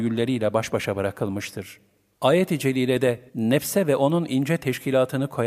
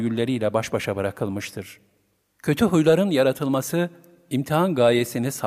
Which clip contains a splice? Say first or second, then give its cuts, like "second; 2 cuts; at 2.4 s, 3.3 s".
first; 2 cuts; at 2.1 s, 3.3 s